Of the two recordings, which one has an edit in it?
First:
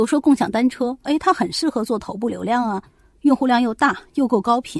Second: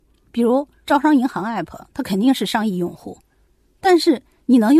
first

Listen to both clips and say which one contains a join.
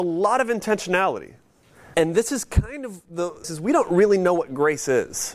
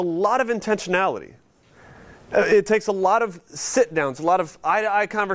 first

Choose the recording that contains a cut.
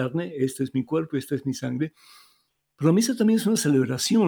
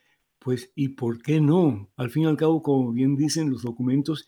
second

